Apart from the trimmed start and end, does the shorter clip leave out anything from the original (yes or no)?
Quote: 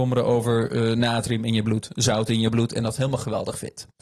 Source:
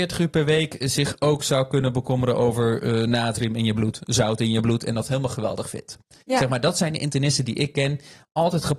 no